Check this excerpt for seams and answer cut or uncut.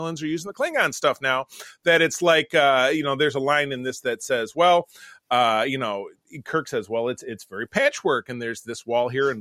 uncut